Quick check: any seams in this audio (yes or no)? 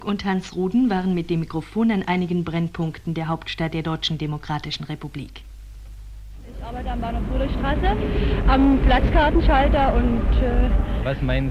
no